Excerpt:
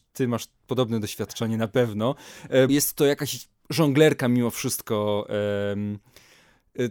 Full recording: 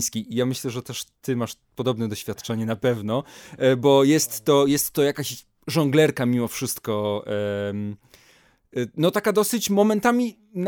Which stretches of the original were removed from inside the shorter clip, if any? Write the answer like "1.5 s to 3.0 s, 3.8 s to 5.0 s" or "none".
3.8 s to 4.7 s